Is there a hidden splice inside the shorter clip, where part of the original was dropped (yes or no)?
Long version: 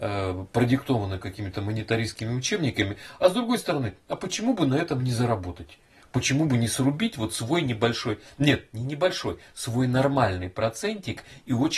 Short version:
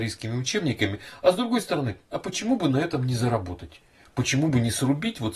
no